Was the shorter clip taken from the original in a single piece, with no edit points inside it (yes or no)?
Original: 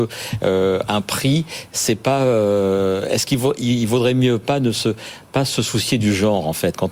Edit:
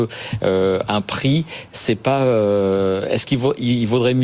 yes